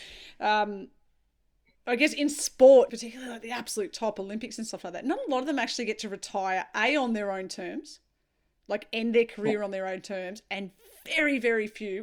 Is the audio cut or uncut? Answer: cut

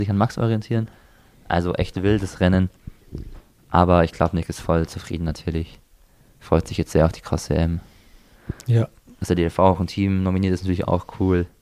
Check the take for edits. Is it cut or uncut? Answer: uncut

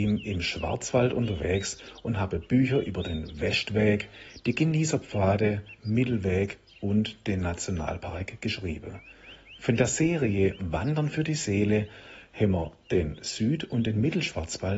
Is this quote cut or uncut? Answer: cut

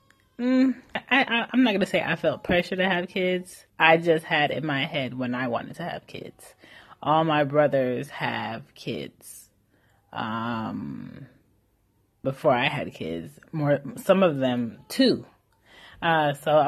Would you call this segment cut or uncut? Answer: cut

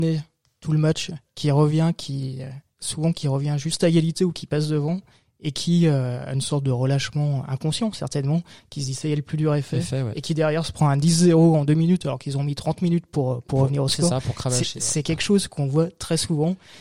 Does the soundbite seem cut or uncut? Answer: uncut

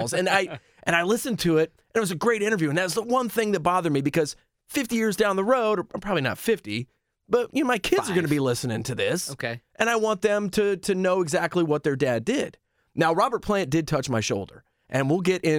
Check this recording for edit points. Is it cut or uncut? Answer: uncut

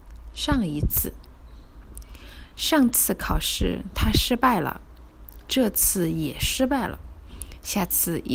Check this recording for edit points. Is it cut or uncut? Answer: uncut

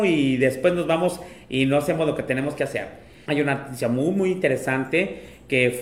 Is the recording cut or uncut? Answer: cut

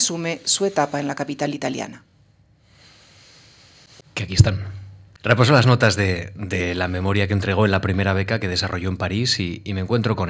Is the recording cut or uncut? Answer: uncut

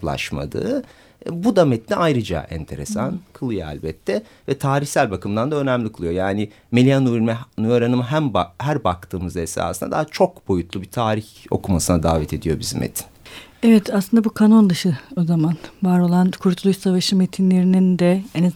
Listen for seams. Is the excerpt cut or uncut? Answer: uncut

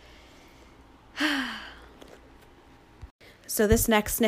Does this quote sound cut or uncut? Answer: uncut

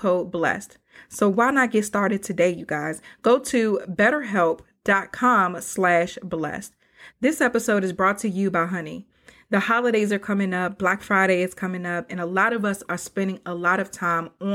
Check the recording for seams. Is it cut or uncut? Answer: cut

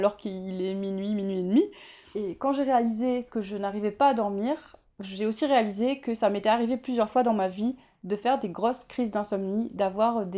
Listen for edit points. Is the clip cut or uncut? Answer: cut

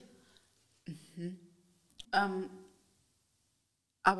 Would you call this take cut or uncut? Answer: cut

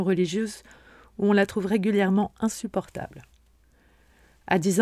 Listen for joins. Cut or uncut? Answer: uncut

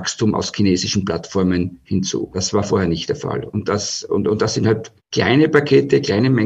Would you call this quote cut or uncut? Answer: uncut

